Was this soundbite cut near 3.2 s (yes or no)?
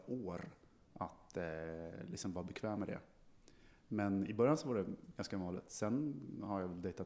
no